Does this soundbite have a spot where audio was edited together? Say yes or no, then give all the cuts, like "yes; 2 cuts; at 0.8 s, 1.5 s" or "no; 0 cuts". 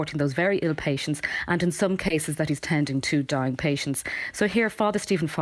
no; 0 cuts